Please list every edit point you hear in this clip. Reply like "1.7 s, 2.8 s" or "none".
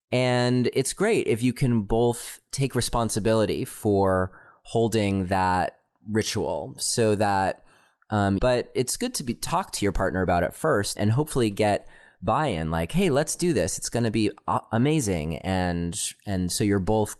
8.4 s, 11.0 s